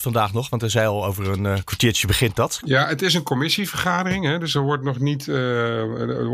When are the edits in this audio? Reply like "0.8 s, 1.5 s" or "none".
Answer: 2.6 s